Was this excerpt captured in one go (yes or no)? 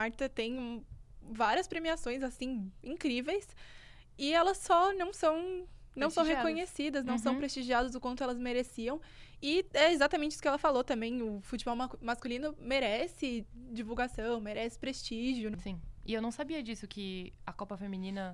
yes